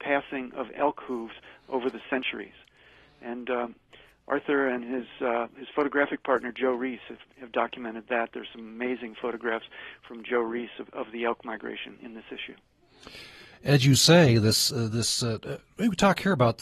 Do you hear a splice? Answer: no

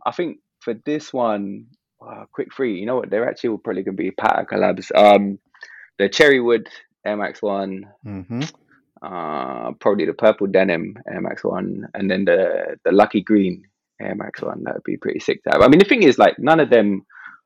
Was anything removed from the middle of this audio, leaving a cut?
no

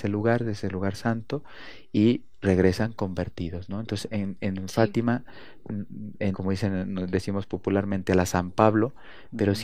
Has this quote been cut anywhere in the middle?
yes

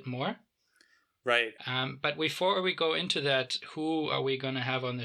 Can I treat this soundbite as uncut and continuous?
no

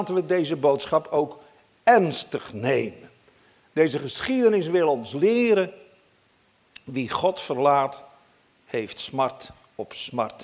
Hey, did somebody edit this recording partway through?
no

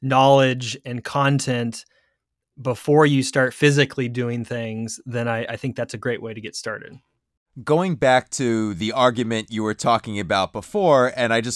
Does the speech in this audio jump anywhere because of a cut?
no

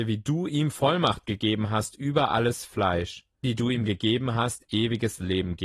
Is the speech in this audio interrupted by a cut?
yes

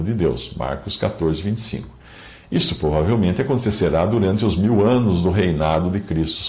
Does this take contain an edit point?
no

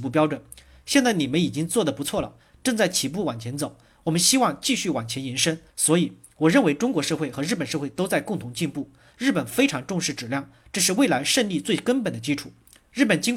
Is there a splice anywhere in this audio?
yes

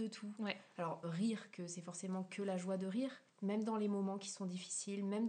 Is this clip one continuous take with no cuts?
no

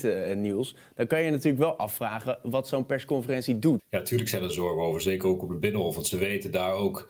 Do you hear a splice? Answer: yes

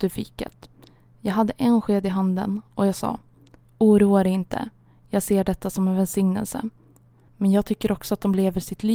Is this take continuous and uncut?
no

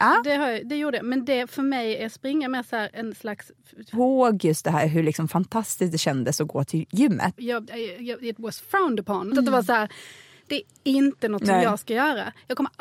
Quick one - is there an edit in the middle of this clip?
yes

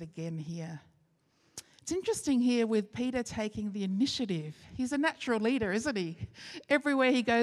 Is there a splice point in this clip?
no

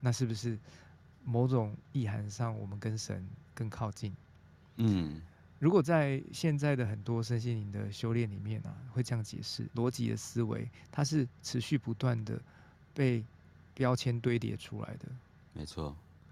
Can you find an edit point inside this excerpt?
yes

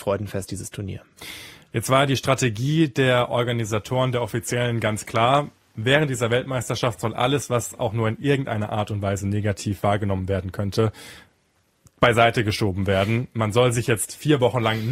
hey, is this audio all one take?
yes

